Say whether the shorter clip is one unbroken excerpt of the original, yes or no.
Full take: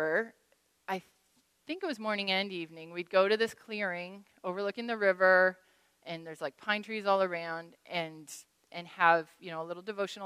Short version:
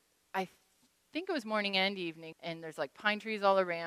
no